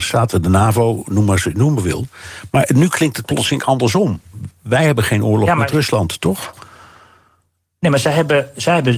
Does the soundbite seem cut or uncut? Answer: uncut